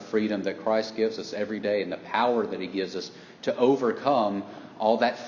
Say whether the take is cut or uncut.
uncut